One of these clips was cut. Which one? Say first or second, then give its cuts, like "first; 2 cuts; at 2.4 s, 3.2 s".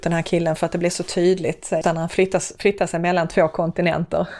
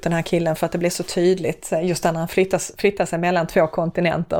first; 1 cut; at 1.8 s